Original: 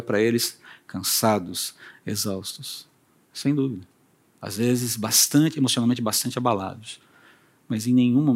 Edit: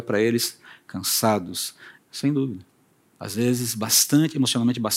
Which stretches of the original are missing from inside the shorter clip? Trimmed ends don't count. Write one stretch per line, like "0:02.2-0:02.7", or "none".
0:02.0-0:03.2